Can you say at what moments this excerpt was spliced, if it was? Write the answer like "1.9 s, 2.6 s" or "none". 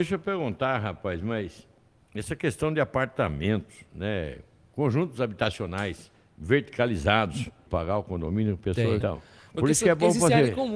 7.7 s, 9.0 s

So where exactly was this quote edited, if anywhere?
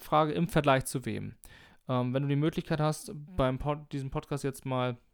none

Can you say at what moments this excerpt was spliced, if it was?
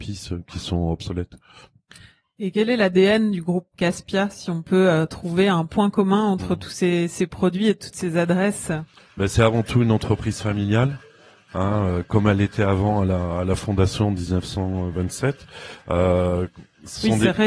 none

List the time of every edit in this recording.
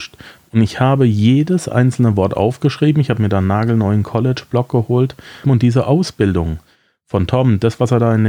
5.4 s

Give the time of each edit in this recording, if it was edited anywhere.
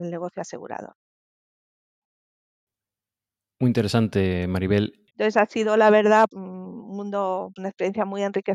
5.1 s, 6.3 s, 7.6 s

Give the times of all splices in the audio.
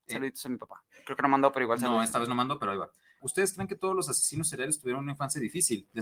3.2 s

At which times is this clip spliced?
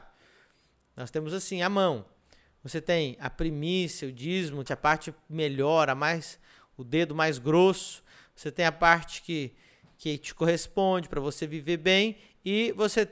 4.7 s

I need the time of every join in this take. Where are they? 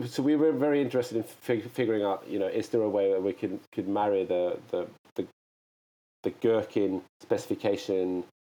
7.1 s

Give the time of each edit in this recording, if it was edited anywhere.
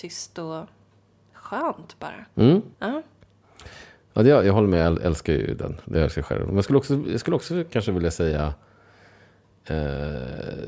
2.7 s

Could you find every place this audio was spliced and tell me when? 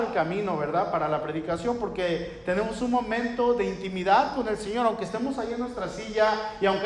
none

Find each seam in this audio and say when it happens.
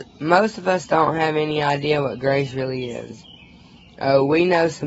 none

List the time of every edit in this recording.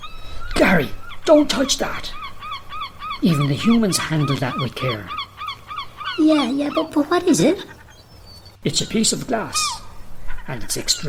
6.9 s

